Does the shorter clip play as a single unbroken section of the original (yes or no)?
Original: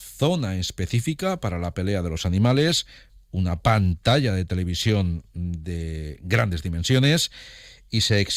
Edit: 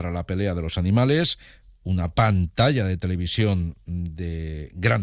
yes